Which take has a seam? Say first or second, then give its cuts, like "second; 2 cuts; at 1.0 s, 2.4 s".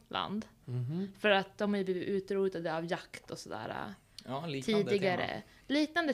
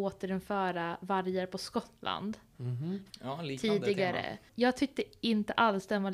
second; 2 cuts; at 3.1 s, 4.5 s